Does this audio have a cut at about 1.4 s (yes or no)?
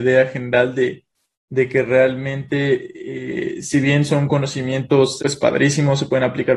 no